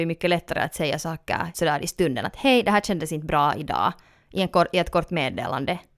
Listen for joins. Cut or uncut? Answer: cut